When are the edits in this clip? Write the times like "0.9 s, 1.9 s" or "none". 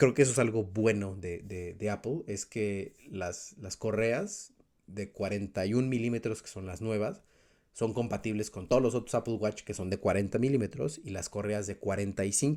none